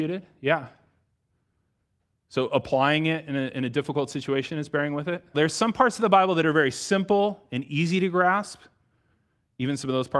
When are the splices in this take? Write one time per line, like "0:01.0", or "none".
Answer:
0:05.3